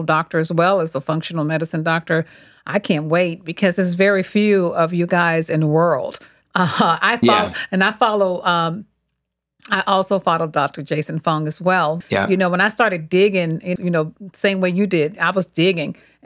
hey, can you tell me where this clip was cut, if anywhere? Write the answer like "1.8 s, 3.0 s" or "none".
12.0 s, 13.8 s